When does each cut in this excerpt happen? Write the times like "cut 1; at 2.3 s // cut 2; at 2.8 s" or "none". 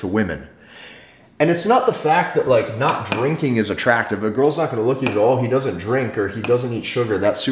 none